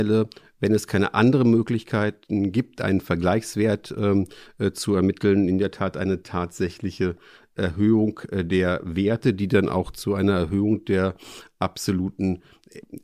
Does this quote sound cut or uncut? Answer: uncut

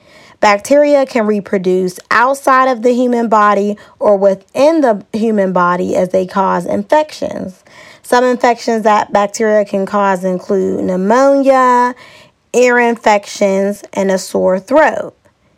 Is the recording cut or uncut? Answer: uncut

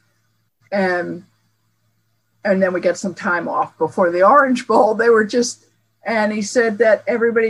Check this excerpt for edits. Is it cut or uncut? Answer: uncut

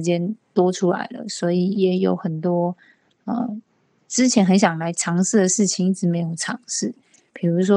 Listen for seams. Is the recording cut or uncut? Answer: cut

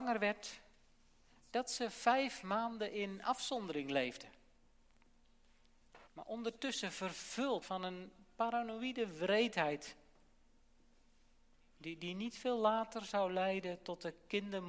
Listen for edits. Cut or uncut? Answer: cut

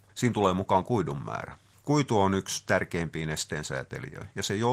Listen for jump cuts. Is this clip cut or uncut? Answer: uncut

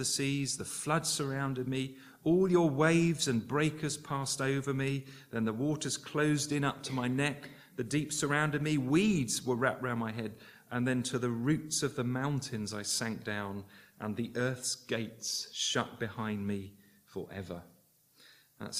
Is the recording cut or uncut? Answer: uncut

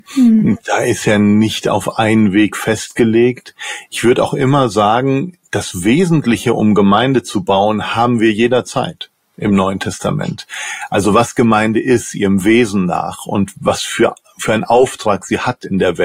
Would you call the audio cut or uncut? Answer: uncut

